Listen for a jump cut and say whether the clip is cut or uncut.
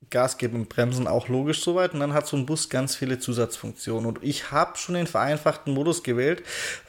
uncut